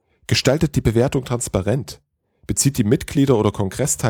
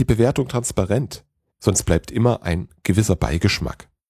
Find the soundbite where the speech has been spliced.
second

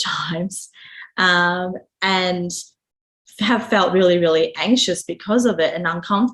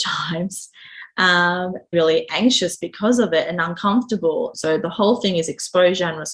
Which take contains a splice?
second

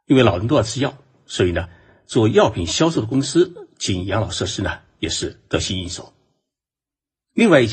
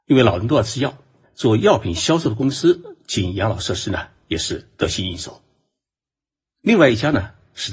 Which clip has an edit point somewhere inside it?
second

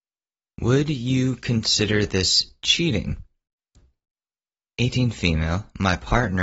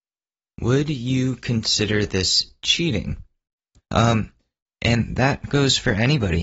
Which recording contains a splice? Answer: second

